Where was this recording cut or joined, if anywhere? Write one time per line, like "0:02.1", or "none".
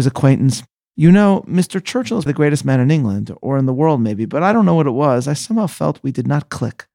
0:02.3